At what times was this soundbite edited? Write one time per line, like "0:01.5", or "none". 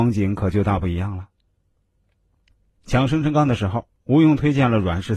none